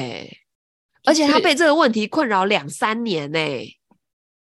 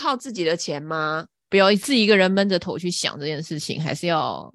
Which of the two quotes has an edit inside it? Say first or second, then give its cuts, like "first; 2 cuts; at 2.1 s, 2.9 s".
second; 1 cut; at 1.5 s